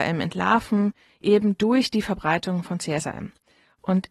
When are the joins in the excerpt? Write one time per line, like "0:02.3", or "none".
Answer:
none